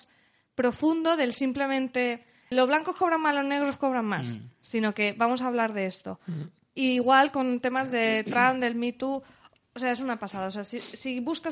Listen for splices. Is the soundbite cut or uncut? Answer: cut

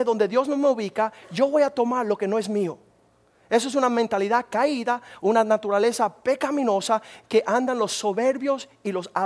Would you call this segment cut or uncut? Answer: uncut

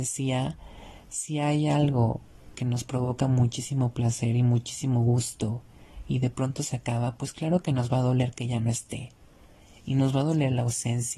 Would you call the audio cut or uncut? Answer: uncut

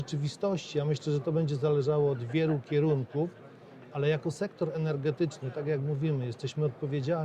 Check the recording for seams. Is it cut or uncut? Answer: uncut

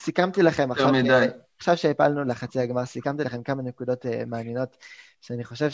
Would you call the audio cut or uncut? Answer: uncut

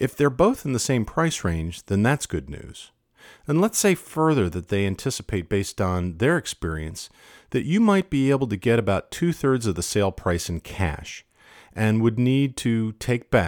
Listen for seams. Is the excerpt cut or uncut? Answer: uncut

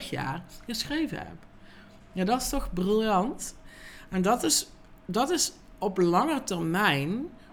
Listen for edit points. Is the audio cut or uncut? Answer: uncut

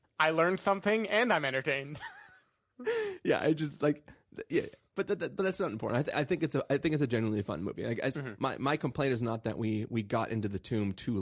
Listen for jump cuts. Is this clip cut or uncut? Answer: uncut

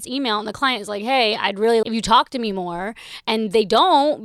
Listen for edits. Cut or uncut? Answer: cut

